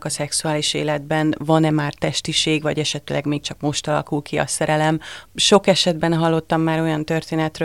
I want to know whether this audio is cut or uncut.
cut